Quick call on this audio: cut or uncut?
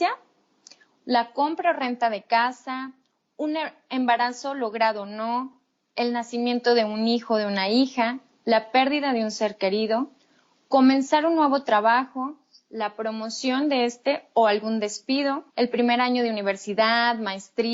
cut